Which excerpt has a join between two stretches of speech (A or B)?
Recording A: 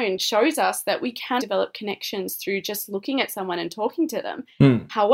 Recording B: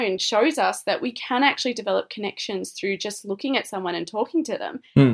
A